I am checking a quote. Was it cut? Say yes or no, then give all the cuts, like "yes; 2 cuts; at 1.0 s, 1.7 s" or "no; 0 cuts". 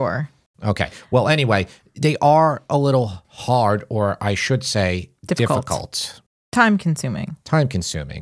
no; 0 cuts